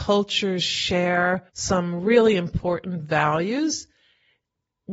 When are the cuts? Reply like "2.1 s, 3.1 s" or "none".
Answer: 1.5 s